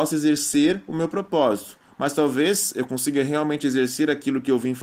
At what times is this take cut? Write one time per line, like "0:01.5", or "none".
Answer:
none